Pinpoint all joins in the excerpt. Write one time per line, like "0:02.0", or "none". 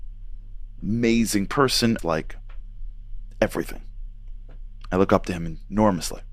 0:02.0